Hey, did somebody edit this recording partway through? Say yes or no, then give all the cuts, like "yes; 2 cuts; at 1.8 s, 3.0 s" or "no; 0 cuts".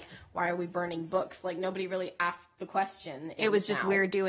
yes; 1 cut; at 3.4 s